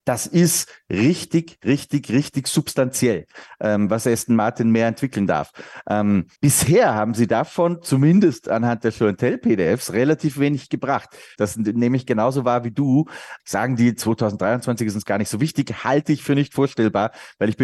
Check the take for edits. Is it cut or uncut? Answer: cut